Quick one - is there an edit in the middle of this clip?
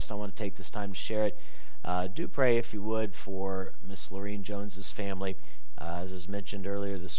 no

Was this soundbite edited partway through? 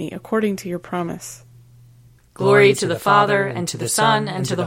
yes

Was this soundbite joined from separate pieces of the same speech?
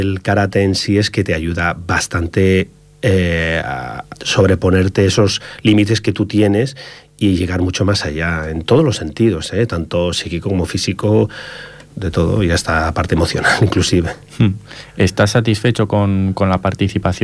yes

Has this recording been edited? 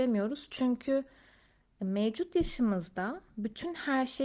no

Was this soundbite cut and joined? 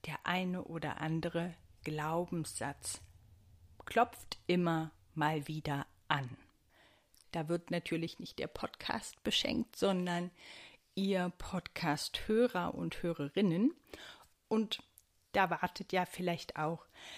yes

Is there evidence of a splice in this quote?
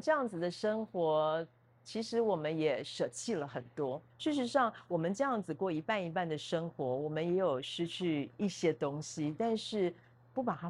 yes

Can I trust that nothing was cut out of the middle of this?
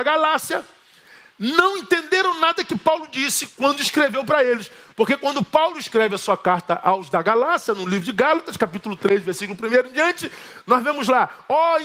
yes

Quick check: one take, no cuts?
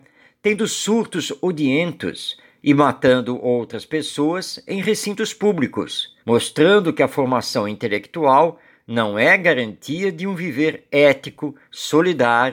no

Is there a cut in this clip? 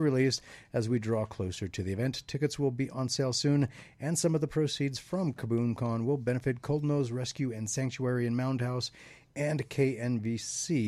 no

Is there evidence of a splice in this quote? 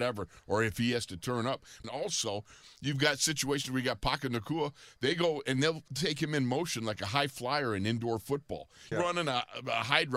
yes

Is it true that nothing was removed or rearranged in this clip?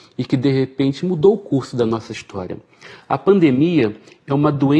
yes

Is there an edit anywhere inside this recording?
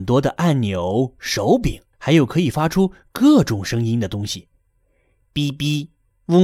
yes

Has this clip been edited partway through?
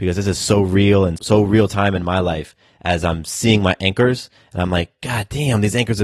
yes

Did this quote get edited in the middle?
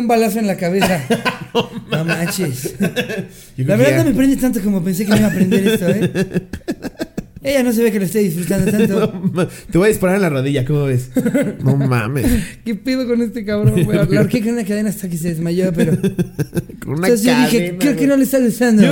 no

